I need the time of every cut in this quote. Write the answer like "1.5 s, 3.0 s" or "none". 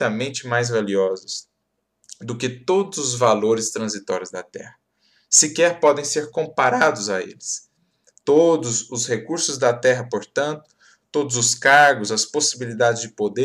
none